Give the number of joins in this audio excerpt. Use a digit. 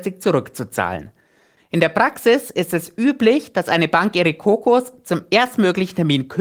1